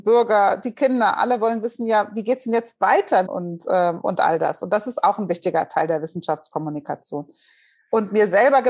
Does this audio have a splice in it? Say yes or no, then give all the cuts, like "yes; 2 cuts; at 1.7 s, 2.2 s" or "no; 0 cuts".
yes; 1 cut; at 3.3 s